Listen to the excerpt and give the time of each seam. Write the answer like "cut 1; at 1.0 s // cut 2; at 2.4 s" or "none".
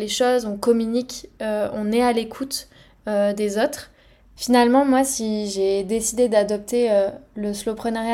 cut 1; at 4.4 s